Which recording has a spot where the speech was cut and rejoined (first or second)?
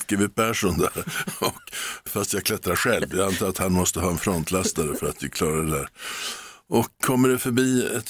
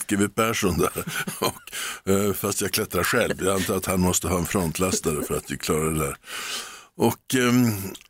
first